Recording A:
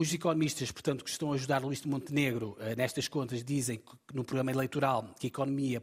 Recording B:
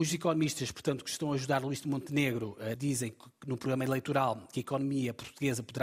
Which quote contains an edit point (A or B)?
B